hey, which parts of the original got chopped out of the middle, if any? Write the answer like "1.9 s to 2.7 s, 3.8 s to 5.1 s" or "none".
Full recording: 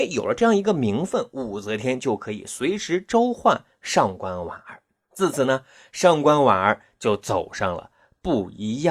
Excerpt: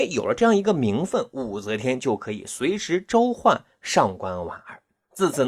none

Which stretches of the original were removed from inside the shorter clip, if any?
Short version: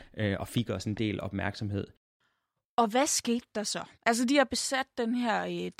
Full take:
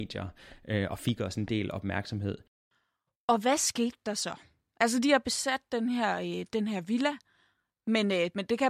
4.5 s to 4.7 s

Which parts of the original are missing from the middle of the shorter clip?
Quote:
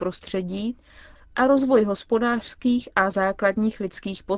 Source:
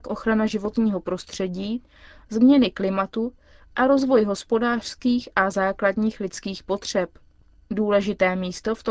2.2 s to 3.6 s

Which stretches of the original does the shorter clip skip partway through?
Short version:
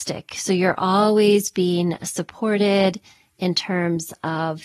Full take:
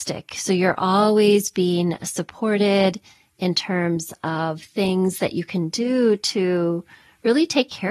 none

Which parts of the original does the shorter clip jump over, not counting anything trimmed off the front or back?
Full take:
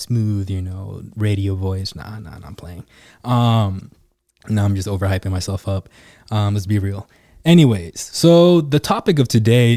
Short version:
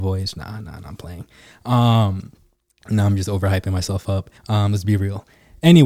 6.0 s to 6.2 s

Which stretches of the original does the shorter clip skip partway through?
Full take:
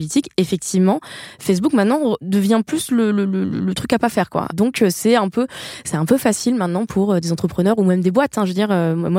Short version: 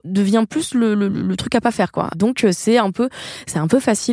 3.3 s to 3.5 s

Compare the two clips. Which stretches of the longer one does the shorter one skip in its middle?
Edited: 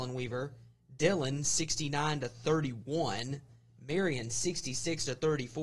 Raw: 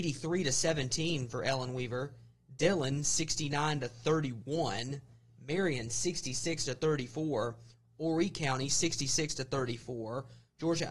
none

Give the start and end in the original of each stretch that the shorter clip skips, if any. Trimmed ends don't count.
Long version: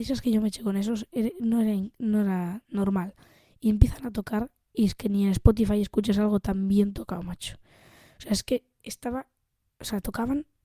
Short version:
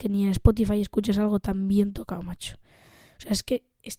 none

